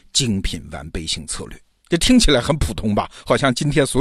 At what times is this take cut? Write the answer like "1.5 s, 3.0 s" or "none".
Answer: 1.8 s